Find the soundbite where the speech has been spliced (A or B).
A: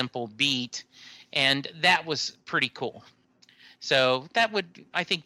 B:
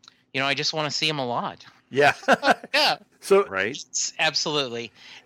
B